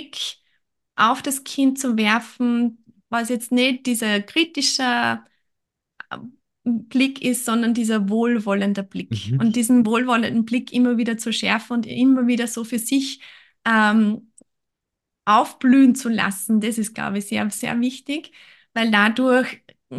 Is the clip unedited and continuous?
yes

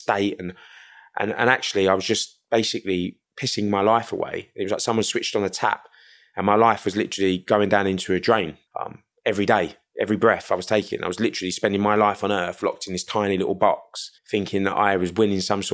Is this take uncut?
no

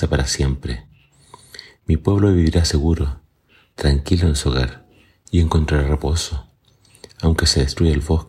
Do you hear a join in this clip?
no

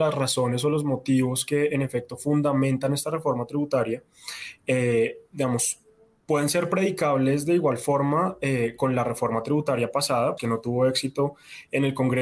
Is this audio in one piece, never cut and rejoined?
no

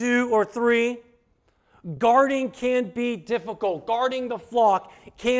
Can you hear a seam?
no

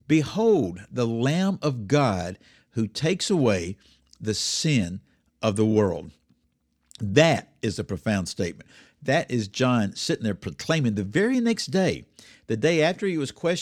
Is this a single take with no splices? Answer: yes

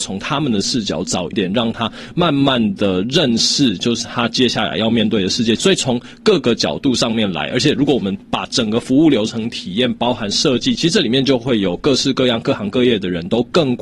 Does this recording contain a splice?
yes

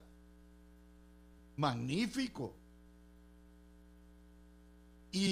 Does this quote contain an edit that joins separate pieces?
yes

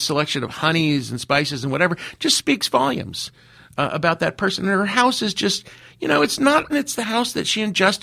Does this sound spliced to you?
yes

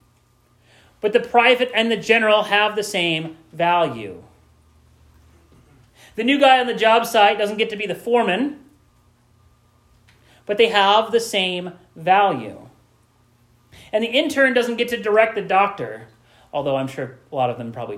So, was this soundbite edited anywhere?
no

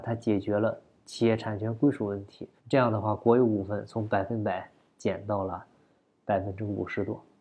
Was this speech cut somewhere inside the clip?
yes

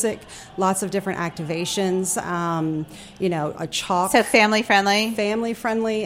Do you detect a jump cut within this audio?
no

